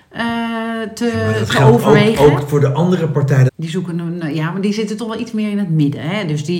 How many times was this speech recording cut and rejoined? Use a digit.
1